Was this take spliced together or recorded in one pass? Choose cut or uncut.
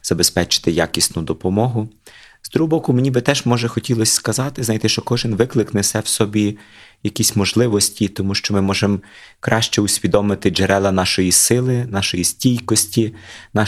uncut